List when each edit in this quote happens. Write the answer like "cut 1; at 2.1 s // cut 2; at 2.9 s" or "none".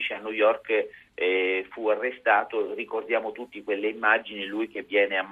none